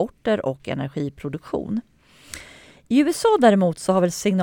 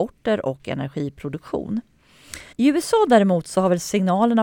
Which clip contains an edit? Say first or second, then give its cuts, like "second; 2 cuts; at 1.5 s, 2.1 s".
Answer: second; 1 cut; at 2.5 s